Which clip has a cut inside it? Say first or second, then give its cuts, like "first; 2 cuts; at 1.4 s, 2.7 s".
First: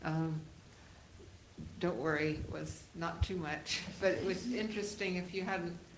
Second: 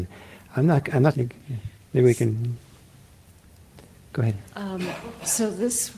second; 1 cut; at 1.1 s